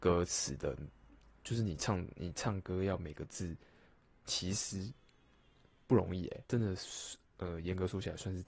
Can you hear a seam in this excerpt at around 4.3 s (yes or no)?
yes